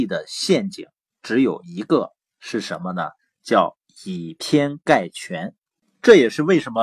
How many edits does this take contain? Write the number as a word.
zero